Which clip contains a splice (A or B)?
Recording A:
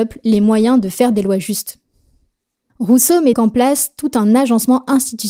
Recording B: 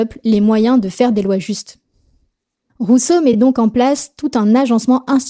A